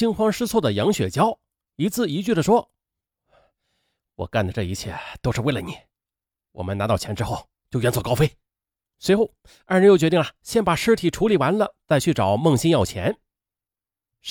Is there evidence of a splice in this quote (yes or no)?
yes